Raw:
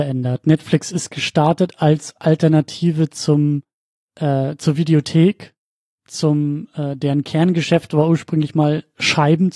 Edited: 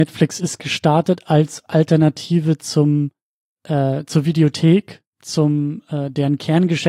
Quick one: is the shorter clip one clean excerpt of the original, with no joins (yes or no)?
no